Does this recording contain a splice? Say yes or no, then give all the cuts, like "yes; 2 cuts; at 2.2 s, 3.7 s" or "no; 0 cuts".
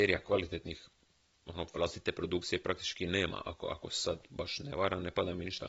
no; 0 cuts